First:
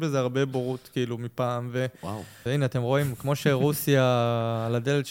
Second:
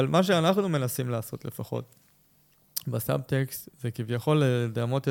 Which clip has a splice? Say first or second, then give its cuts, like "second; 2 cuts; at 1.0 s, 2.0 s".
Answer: first; 1 cut; at 2.5 s